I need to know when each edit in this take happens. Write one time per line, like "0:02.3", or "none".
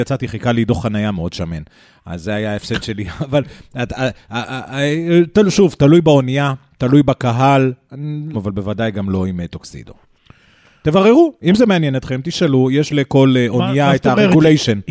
0:08.3